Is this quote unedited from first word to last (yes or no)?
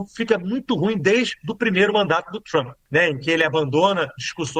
yes